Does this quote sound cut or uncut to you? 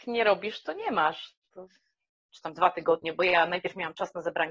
cut